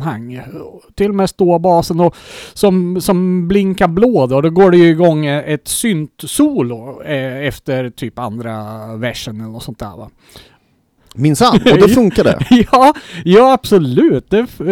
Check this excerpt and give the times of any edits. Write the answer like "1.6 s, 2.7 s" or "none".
11.0 s